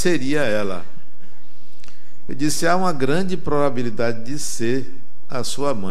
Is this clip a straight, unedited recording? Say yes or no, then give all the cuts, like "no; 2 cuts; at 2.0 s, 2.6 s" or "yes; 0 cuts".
yes; 0 cuts